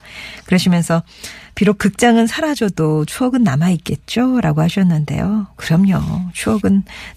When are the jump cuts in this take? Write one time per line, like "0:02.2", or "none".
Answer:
none